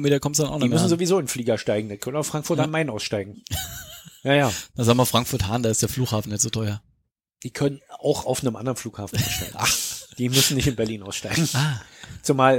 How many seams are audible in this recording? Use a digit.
0